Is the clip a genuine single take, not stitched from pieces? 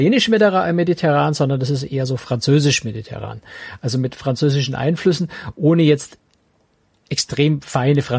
yes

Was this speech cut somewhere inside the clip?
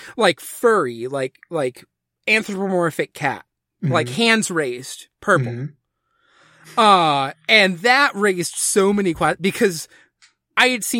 no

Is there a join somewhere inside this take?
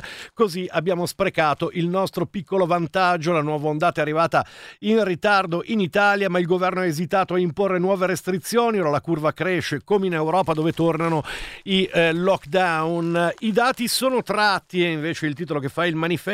no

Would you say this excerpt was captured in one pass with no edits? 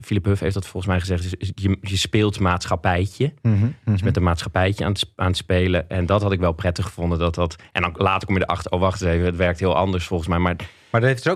yes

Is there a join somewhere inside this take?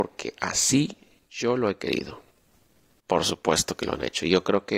yes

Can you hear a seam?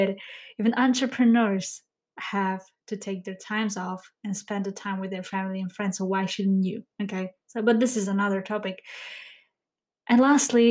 no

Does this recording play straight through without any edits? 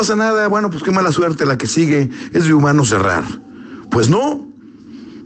yes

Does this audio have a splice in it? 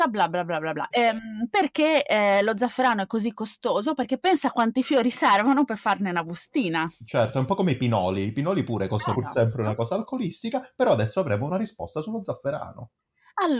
yes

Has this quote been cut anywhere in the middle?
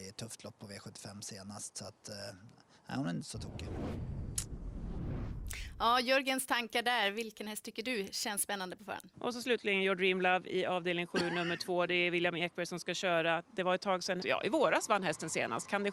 yes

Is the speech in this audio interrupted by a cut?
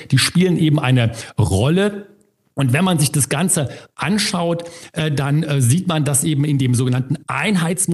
no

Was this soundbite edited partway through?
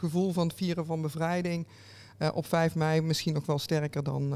no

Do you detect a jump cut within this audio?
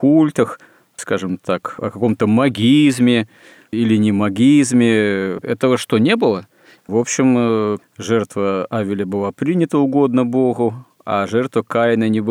yes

